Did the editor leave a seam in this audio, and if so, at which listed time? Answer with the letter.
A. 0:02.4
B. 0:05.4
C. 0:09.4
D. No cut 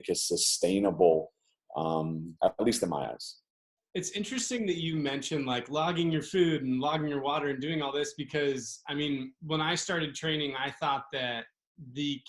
A